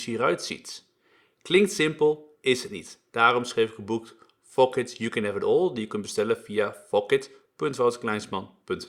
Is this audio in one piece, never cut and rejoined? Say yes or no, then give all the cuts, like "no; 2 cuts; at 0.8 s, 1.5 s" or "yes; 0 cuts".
yes; 0 cuts